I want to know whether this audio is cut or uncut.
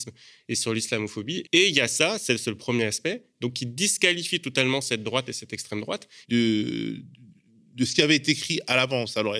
cut